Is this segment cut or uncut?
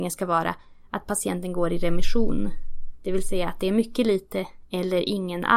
uncut